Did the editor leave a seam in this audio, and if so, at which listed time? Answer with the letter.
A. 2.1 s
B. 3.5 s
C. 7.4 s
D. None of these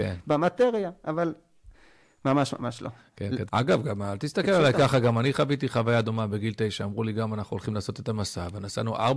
B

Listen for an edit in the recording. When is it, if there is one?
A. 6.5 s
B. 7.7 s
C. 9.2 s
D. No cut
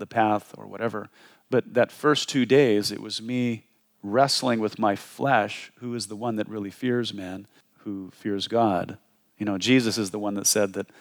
B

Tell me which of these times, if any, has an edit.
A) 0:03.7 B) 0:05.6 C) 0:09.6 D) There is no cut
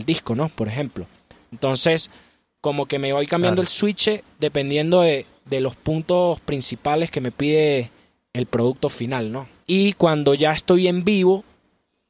C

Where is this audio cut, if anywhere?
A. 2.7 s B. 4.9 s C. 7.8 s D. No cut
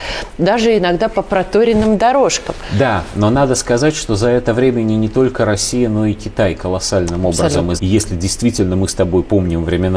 C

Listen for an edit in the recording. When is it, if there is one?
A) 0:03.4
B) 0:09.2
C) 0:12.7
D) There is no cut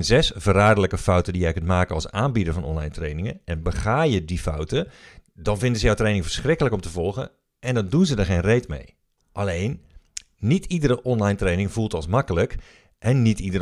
B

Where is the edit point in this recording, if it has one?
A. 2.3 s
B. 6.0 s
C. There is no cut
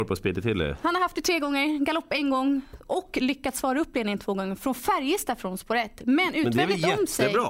B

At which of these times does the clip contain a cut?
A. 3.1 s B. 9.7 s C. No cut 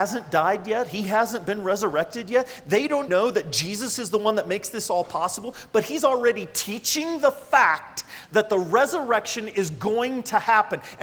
A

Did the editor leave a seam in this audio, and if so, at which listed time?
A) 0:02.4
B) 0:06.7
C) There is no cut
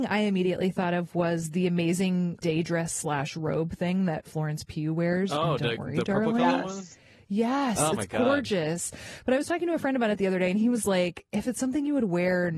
A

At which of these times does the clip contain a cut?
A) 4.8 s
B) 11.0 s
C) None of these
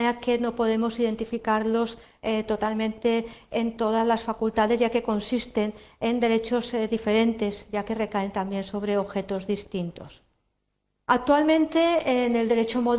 B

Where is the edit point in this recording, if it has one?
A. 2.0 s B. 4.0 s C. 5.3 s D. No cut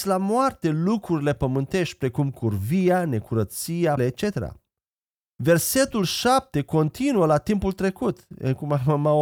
B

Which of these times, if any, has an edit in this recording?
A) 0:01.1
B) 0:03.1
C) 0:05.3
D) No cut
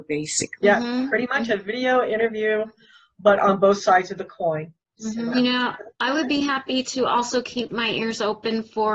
C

